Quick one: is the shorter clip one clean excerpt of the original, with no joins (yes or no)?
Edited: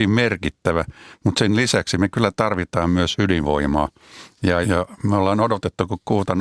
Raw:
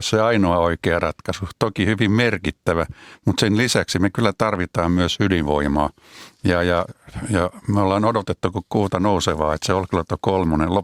no